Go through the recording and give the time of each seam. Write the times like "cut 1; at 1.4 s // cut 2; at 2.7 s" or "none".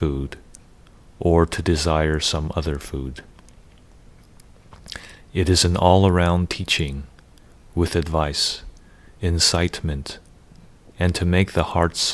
none

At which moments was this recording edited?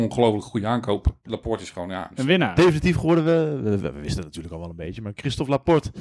cut 1; at 1.2 s // cut 2; at 2.5 s

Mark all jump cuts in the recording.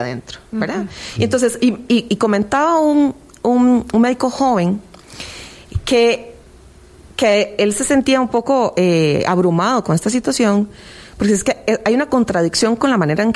none

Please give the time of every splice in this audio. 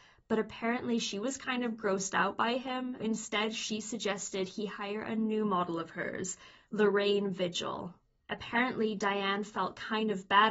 cut 1; at 3.0 s // cut 2; at 8.2 s

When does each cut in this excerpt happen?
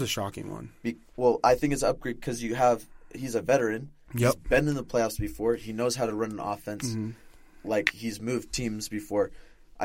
none

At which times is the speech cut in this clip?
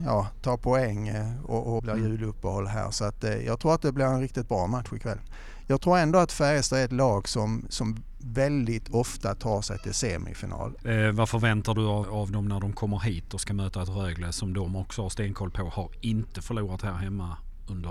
cut 1; at 1.8 s // cut 2; at 10.8 s // cut 3; at 12.0 s

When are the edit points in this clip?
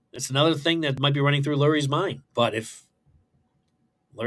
cut 1; at 2.2 s

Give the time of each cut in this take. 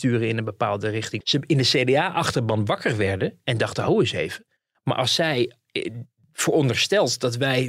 cut 1; at 1.2 s

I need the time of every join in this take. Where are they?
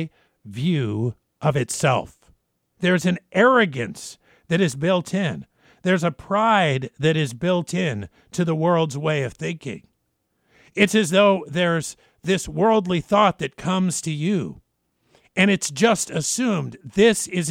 cut 1; at 2.8 s

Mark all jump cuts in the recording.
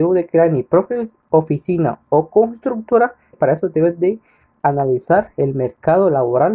cut 1; at 3.3 s

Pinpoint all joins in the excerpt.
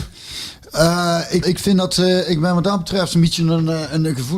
cut 1; at 1.4 s

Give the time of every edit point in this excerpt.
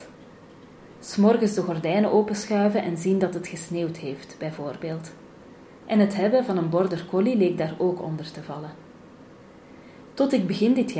none

